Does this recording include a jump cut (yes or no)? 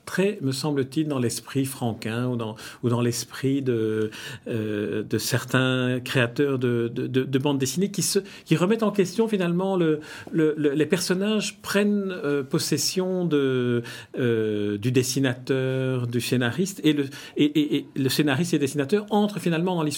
no